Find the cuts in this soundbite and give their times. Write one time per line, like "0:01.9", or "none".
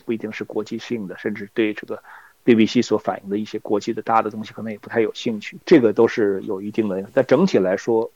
none